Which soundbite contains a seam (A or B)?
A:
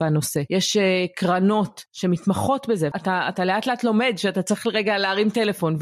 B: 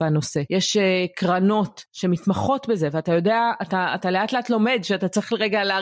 A